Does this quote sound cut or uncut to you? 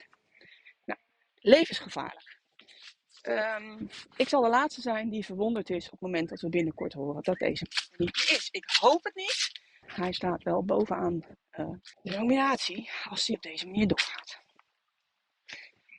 cut